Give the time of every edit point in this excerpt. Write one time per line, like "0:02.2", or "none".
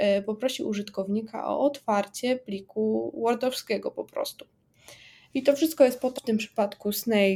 0:06.2